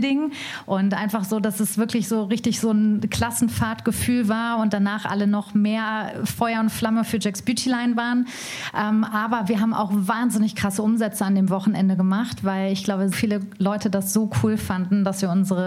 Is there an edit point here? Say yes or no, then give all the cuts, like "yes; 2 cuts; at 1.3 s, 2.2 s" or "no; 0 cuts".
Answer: yes; 1 cut; at 13.1 s